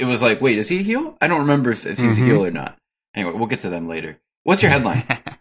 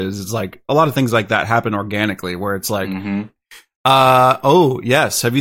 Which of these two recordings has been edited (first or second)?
second